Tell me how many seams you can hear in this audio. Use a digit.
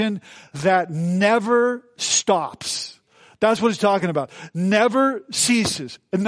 0